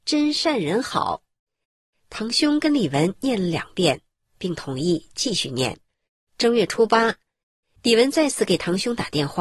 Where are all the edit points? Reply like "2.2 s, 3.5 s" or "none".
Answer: 6.3 s